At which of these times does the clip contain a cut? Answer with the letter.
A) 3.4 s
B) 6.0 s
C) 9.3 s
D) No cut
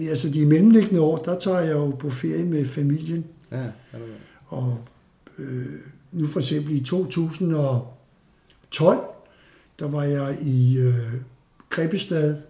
D